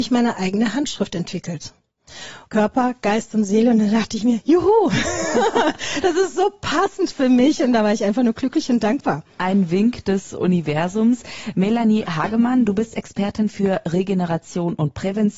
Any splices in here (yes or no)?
yes